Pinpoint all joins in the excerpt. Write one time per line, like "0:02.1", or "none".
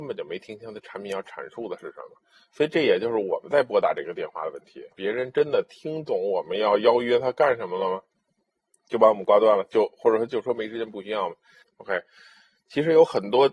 0:04.9
0:11.6